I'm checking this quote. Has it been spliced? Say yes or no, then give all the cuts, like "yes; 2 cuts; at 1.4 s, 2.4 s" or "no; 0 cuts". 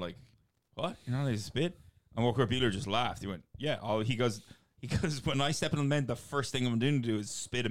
no; 0 cuts